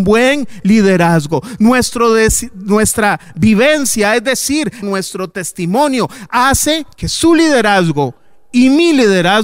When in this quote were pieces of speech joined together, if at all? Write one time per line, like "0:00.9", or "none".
0:04.8
0:06.9